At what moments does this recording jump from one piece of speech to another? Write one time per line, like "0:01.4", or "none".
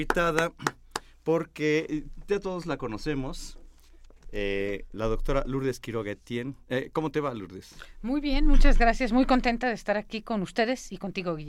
none